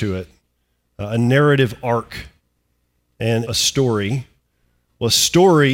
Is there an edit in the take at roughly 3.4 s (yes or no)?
yes